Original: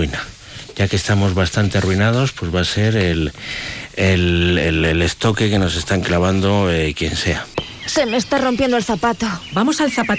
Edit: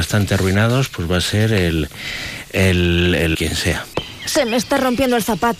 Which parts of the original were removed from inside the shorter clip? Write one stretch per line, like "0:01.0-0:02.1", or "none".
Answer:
0:04.8-0:07.0

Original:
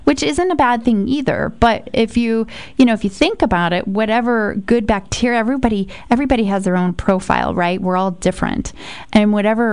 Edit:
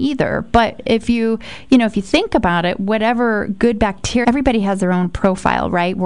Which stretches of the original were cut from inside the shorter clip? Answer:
0:05.3-0:06.1

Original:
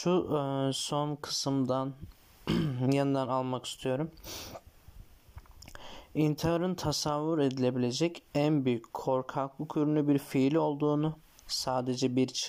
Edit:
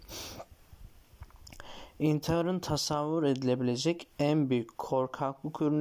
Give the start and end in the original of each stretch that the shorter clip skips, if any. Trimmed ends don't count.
none

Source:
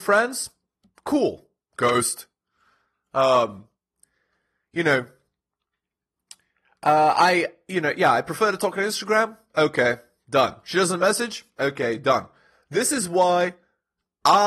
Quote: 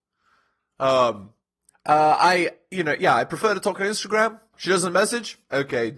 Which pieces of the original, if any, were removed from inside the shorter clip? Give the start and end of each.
0:04.1-0:06.7
0:09.5-0:10.6

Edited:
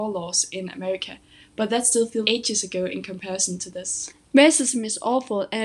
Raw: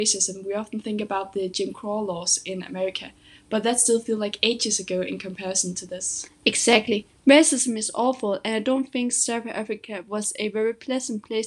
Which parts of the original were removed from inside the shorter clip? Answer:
0:04.2-0:04.4
0:06.4-0:07.1

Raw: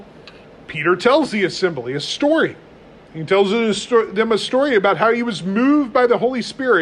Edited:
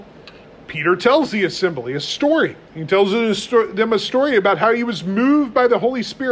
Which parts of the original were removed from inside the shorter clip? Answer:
0:02.6-0:03.0

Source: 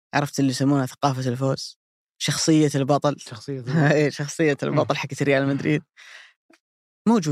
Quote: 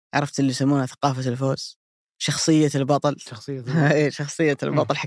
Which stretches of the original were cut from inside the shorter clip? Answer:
none

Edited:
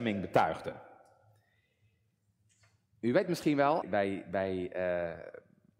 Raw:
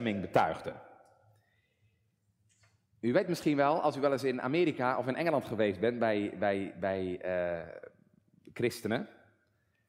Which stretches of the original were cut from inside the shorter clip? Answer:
0:03.8-0:06.3

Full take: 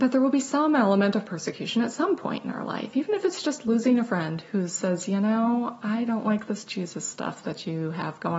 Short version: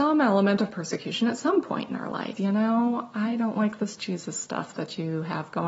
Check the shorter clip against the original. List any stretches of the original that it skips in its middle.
0:02.9-0:05.1

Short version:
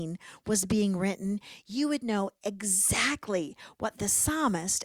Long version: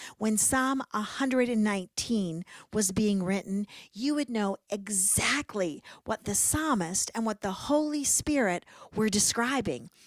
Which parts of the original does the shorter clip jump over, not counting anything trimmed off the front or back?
none

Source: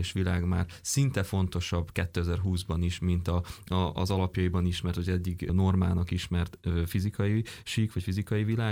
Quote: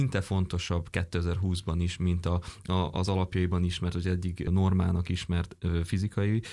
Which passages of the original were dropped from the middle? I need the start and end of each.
none

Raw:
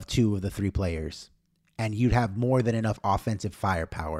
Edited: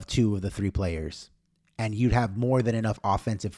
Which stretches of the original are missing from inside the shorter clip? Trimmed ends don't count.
none

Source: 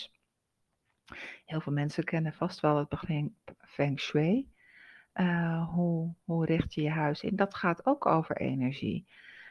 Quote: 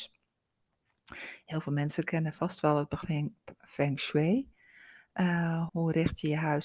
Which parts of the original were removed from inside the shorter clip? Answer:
0:05.7-0:06.2

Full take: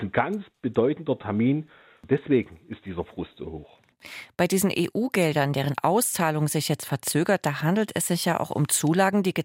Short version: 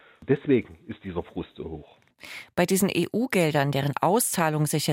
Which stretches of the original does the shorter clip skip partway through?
none

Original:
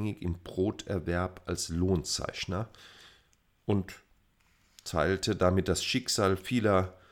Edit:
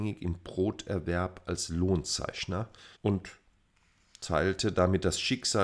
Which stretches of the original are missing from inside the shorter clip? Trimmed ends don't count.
0:02.9-0:03.6

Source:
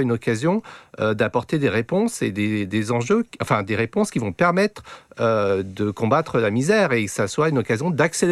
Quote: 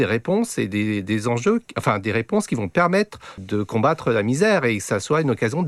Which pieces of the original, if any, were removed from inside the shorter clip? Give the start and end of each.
0:05.0-0:05.7

